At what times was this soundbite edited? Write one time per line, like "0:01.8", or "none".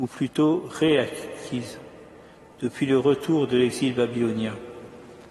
none